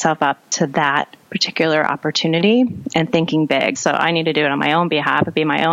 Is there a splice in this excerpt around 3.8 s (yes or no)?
yes